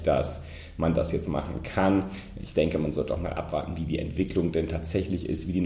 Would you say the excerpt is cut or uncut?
uncut